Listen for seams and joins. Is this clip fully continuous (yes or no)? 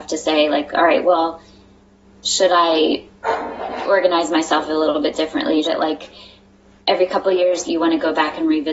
no